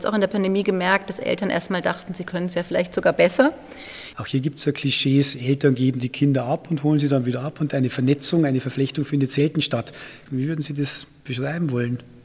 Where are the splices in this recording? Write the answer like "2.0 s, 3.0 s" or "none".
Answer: 4.1 s, 10.3 s